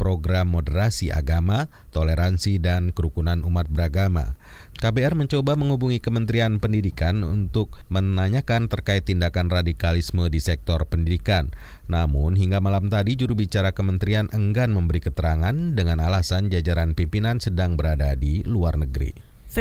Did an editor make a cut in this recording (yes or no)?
yes